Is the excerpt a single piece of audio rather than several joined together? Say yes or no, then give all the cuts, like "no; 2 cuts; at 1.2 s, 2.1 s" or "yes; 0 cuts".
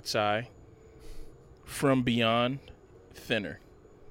yes; 0 cuts